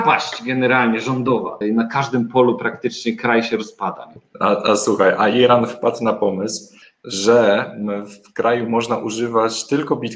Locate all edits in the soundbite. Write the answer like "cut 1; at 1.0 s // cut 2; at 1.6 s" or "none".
cut 1; at 1.6 s